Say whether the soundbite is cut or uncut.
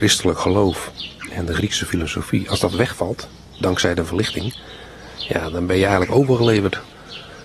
uncut